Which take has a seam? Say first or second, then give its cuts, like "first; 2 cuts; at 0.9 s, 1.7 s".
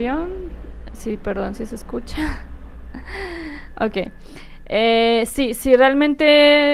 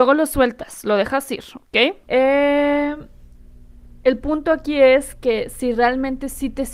second; 1 cut; at 2.0 s